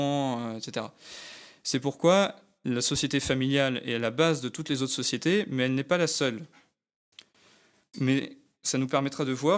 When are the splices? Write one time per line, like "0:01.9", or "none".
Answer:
0:07.8